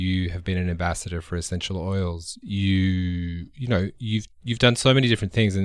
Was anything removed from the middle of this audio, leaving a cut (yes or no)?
yes